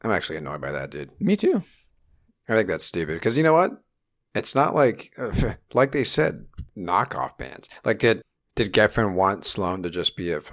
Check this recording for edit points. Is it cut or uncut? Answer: uncut